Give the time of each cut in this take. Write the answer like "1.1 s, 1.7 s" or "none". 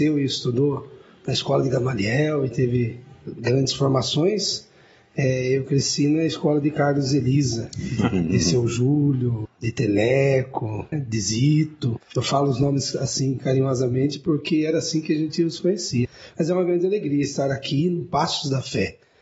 none

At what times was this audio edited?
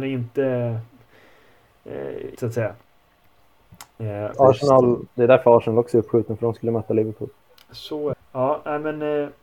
2.3 s, 4.3 s, 8.1 s

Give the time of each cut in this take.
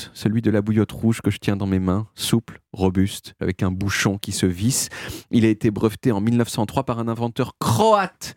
3.4 s

